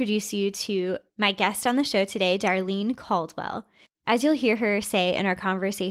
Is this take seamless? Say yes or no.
no